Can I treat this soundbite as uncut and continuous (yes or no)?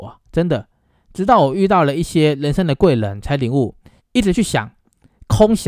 no